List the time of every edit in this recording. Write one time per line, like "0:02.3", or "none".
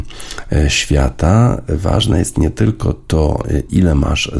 none